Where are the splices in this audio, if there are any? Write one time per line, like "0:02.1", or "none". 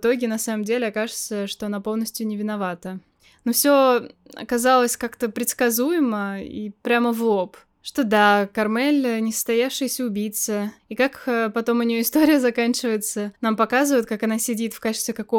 none